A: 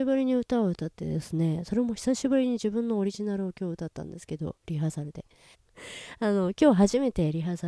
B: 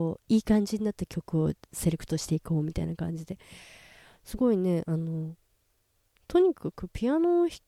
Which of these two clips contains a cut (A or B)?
A